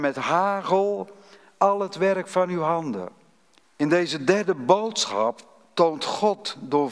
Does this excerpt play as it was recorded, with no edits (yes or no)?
no